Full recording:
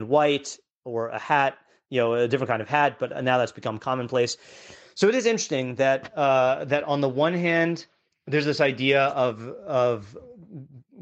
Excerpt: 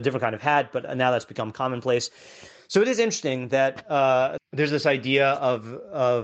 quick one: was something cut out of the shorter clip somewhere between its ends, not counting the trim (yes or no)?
yes